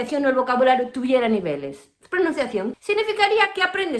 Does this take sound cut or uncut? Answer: cut